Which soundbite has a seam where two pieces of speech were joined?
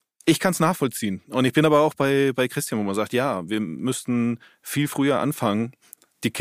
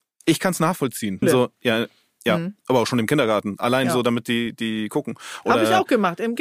second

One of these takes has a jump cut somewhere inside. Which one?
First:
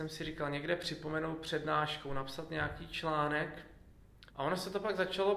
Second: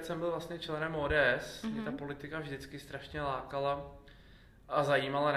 first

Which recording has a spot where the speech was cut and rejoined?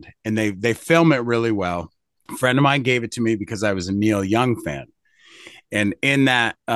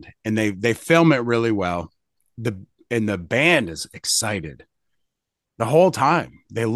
first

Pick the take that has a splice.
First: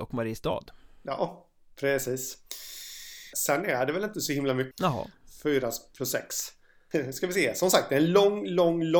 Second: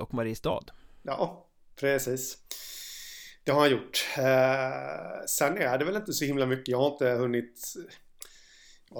first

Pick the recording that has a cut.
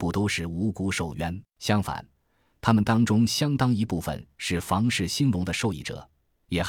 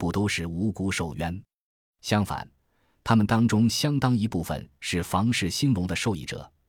first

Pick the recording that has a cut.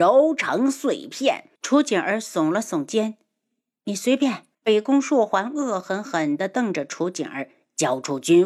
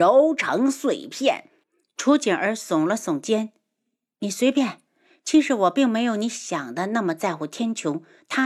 first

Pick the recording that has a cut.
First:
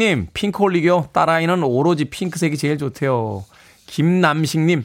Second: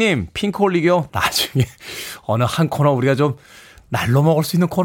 second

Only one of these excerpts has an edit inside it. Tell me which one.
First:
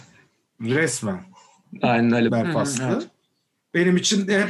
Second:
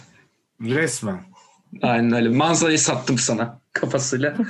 first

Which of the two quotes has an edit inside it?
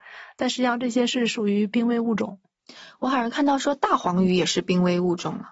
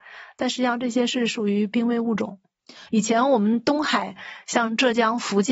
second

